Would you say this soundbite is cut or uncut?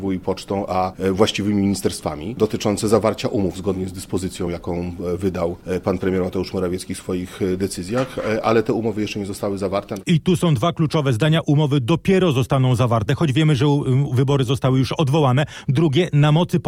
uncut